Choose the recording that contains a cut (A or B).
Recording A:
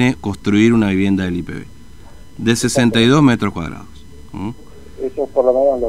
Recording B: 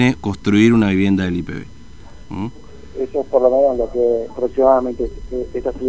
B